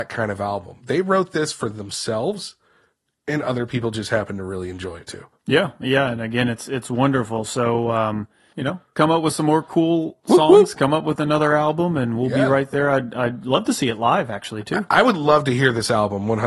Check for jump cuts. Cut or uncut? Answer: cut